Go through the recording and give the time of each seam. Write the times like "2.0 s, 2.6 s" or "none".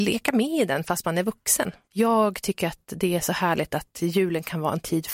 1.8 s